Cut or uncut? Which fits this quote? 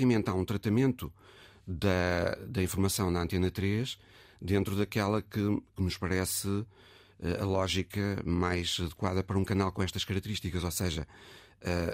uncut